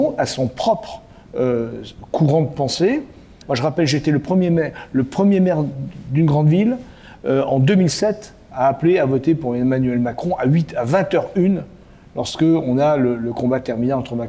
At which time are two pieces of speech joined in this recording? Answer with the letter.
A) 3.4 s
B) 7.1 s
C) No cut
A